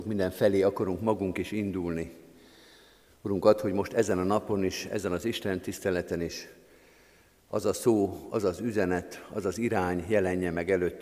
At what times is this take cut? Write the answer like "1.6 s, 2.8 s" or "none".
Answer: none